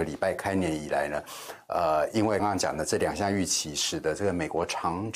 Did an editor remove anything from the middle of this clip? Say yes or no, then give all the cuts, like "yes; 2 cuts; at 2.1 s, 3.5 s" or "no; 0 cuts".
yes; 1 cut; at 2.4 s